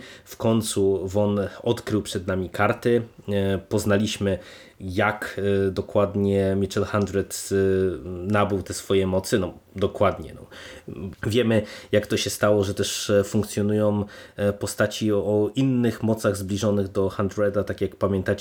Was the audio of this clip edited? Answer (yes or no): yes